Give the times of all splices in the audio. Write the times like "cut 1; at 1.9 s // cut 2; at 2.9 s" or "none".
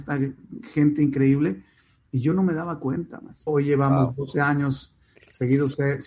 cut 1; at 3.5 s